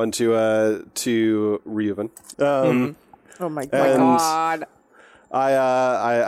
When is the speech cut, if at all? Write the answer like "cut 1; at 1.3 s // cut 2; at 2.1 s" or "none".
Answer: cut 1; at 2.3 s